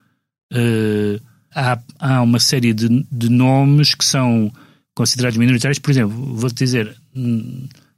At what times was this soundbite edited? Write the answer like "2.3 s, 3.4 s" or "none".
1.5 s